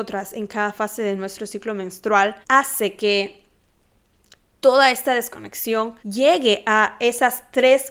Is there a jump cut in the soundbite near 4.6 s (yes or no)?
no